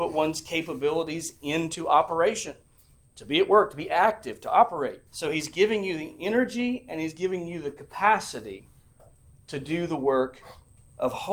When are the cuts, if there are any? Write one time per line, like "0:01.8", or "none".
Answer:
0:05.1